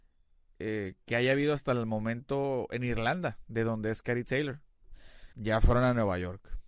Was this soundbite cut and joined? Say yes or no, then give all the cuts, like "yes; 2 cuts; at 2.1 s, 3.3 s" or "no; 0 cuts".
yes; 1 cut; at 5.3 s